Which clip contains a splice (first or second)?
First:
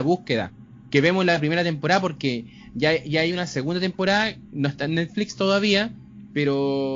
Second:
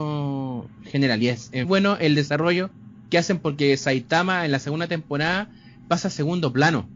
second